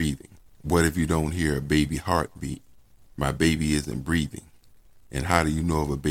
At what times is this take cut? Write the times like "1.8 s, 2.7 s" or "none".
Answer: none

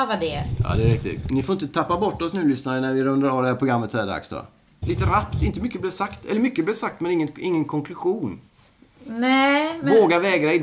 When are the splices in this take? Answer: 4.8 s

